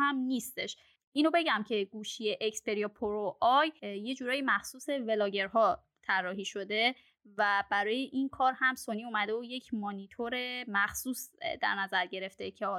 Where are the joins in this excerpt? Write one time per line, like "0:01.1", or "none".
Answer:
none